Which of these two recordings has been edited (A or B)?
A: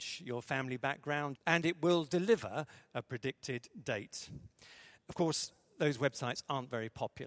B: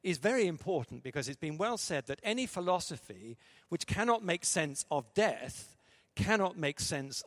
A